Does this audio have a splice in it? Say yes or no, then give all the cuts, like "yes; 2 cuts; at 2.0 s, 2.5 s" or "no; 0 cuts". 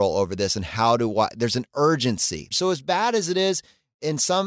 yes; 1 cut; at 2.5 s